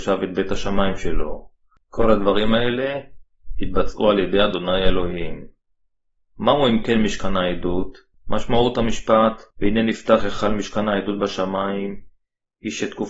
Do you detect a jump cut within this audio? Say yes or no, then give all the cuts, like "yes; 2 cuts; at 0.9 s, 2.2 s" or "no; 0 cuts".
yes; 2 cuts; at 8.1 s, 9.5 s